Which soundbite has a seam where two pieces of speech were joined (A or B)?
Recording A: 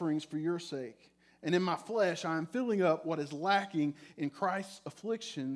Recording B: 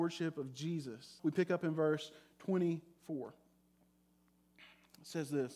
B